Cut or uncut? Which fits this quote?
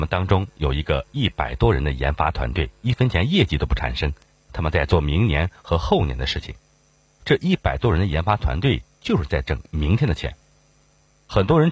uncut